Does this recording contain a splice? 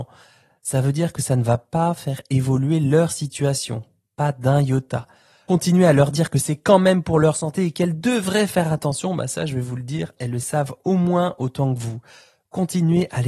yes; 2 cuts; at 5.5 s, 10.2 s

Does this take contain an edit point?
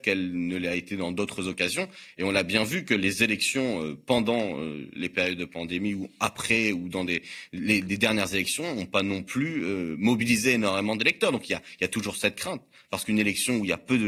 no; 0 cuts

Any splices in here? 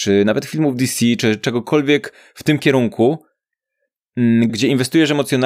yes; 1 cut; at 4.5 s

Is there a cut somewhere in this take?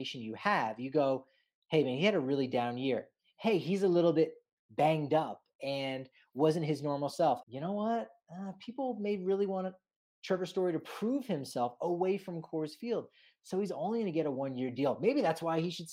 yes; 1 cut; at 7.4 s

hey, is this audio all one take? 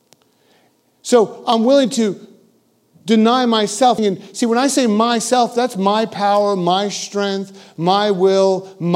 no; 1 cut; at 4.0 s

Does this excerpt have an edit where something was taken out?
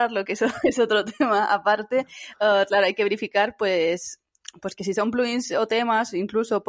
no; 0 cuts

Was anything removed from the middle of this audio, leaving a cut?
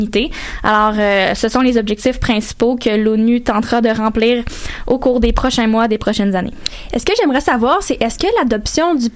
no; 0 cuts

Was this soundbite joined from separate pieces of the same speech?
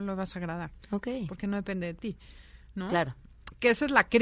no; 0 cuts

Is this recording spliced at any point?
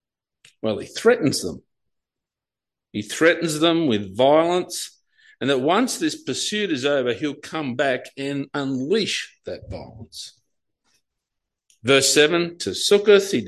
no; 0 cuts

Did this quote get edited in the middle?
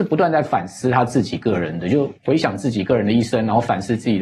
yes; 1 cut; at 2.1 s

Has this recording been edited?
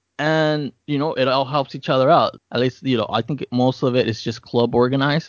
yes; 1 cut; at 2.4 s

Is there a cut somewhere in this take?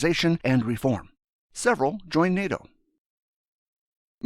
yes; 1 cut; at 1.4 s

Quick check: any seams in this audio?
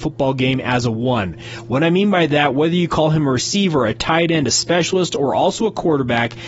no; 0 cuts

